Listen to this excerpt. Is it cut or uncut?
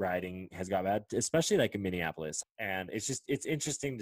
cut